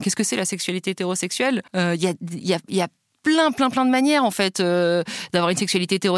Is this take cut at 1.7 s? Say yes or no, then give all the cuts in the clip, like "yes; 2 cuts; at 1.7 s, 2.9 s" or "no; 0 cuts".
yes; 1 cut; at 1.7 s